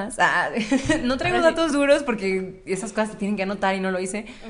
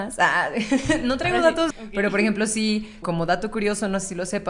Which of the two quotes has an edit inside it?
second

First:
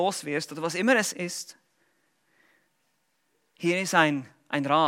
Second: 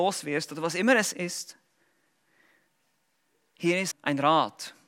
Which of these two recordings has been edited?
second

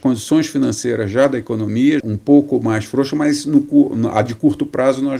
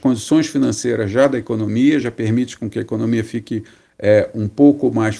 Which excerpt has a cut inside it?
first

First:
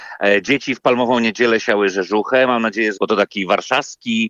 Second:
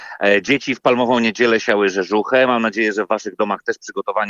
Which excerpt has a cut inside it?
first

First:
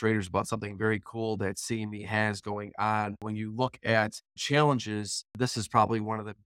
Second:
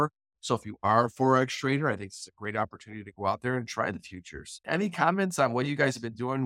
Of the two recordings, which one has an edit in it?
first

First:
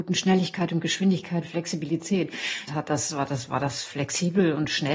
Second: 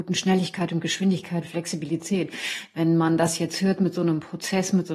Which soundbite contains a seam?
first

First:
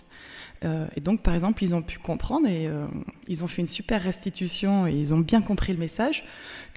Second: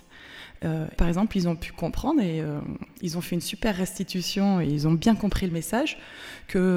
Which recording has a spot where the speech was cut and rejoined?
second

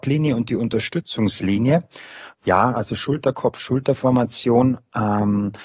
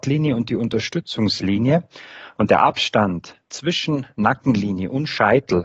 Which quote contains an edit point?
first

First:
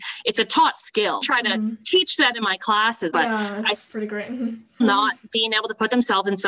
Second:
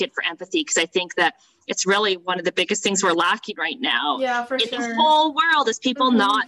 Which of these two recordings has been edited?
first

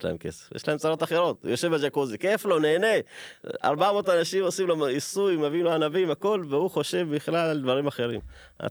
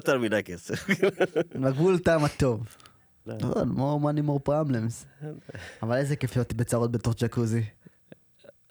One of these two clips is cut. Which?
second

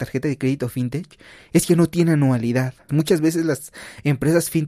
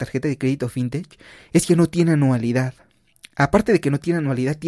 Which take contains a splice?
first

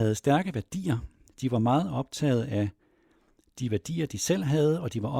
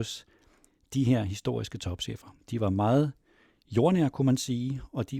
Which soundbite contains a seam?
second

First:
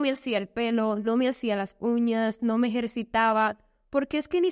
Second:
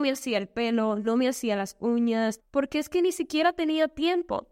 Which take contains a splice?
second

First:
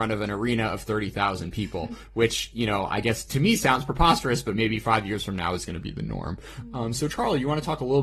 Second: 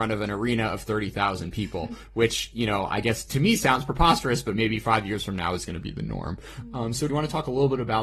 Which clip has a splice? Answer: second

